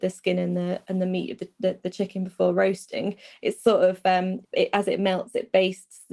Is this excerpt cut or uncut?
cut